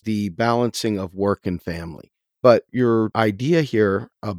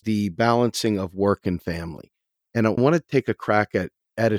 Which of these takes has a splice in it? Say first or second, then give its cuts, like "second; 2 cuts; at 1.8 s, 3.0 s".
first; 1 cut; at 2.4 s